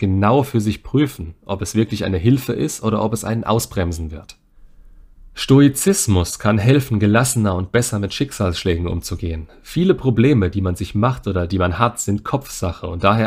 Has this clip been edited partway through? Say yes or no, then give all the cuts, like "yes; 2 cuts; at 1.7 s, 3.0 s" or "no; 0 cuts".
no; 0 cuts